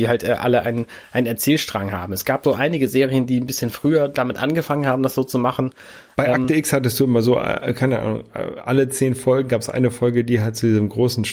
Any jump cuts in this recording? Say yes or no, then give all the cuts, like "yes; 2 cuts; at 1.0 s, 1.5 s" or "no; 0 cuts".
no; 0 cuts